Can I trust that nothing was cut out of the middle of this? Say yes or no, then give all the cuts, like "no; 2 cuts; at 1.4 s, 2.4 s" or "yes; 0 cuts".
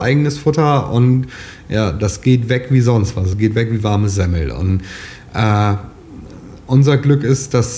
yes; 0 cuts